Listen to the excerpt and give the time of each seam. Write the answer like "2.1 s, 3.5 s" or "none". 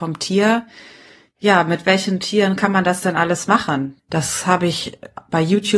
4.0 s